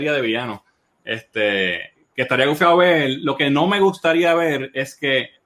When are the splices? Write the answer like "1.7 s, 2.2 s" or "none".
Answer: none